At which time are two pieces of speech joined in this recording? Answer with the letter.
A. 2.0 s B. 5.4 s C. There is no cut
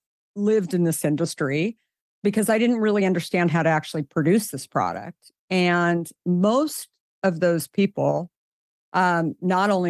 A